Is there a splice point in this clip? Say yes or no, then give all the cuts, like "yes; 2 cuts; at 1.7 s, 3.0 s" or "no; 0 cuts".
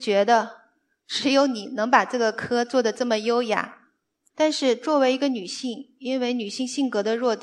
yes; 1 cut; at 4.3 s